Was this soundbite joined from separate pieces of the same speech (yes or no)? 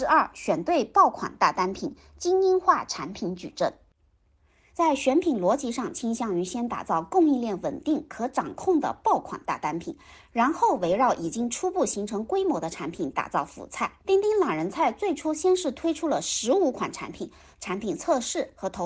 yes